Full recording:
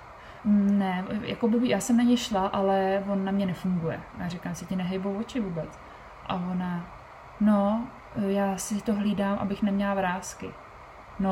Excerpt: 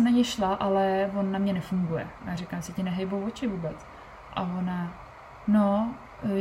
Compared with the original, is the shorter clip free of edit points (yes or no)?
yes